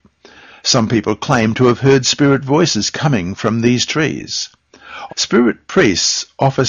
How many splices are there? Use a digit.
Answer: 1